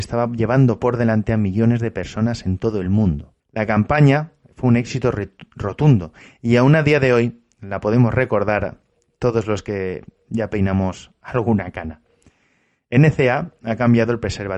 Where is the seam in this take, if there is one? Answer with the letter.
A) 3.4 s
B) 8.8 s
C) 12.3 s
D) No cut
A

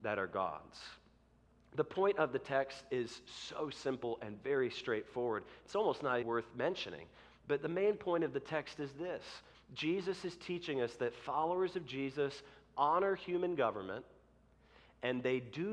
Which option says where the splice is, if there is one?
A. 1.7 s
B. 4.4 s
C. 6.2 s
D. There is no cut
C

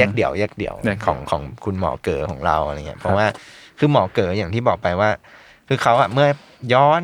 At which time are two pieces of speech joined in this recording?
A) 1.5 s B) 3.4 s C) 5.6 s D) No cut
D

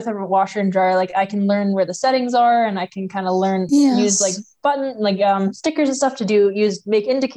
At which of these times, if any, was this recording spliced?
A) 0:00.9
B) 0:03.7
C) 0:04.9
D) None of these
B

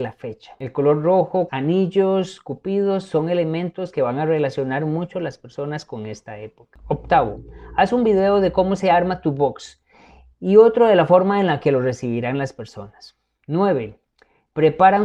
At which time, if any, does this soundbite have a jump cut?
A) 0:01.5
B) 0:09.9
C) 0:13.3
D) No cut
A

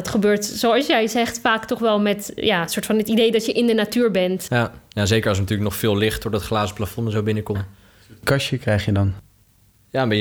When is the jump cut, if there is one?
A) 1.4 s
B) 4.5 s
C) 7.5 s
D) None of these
C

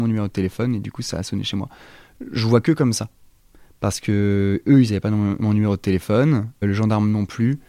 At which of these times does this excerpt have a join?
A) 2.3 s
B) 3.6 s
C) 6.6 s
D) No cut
C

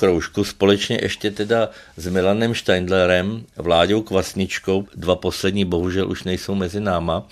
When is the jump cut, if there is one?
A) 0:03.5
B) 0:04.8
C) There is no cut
B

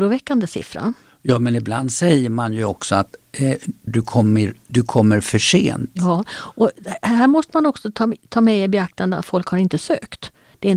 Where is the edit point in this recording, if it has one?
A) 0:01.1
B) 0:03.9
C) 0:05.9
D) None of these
B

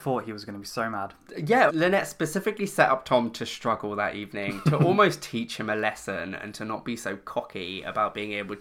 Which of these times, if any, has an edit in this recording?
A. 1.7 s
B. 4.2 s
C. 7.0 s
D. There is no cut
A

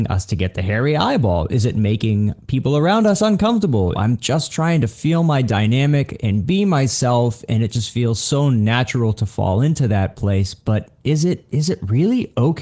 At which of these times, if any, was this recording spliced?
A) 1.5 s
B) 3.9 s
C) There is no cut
B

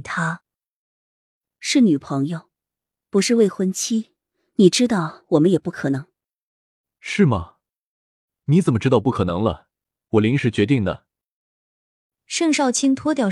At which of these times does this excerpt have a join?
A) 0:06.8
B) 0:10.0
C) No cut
B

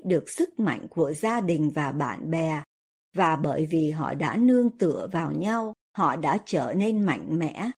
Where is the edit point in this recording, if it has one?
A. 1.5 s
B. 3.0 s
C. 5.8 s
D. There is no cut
C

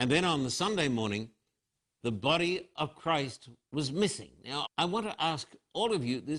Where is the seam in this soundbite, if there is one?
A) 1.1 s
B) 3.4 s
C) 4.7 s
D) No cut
C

